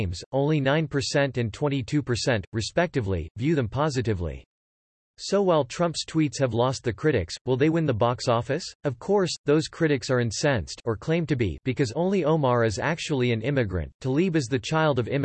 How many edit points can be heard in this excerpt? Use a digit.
1